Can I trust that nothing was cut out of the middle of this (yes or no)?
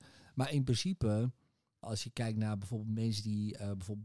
no